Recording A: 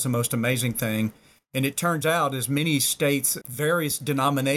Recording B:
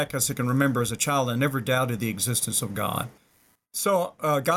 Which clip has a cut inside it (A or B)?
A